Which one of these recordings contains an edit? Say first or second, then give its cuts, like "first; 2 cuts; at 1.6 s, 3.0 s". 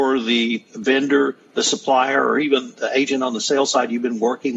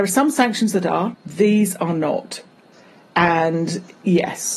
second; 1 cut; at 1.1 s